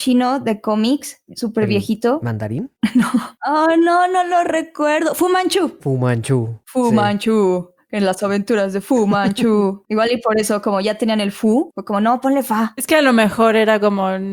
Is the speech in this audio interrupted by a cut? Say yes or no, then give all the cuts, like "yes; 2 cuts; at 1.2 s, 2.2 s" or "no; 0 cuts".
no; 0 cuts